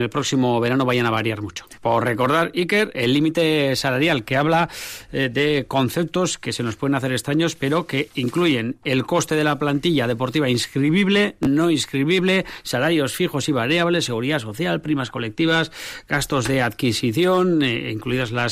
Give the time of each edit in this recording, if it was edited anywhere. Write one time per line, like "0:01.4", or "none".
0:01.8
0:02.9